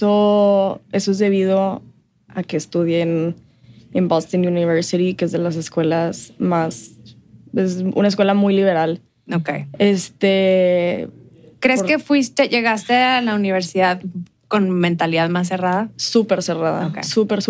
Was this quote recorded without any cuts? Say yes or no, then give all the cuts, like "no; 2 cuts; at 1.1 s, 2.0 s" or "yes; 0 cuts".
yes; 0 cuts